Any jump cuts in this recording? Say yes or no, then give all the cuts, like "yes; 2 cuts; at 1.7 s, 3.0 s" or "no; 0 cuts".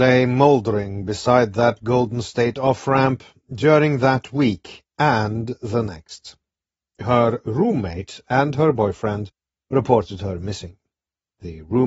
no; 0 cuts